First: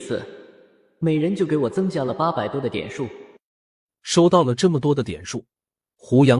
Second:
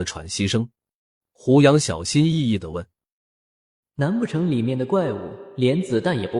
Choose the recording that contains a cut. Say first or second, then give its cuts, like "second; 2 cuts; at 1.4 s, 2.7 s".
second; 2 cuts; at 1.2 s, 3.8 s